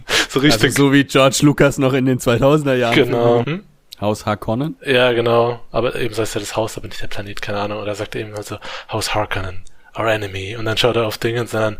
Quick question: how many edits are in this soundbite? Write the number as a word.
one